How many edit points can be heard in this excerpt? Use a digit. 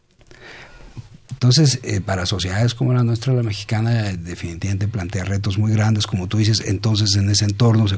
1